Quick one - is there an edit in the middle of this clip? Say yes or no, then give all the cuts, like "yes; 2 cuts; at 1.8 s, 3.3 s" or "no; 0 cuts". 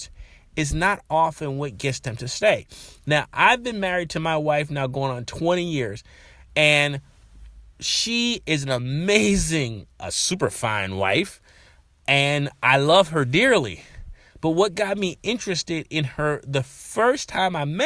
no; 0 cuts